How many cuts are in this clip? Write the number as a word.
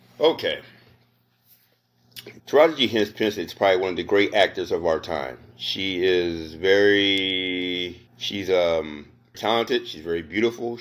three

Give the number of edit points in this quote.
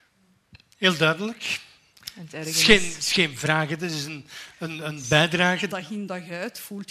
one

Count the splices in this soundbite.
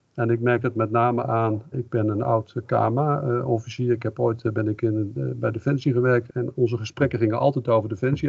two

